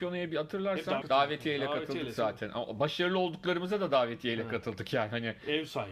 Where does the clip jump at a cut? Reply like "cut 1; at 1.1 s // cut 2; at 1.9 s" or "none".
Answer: cut 1; at 1.0 s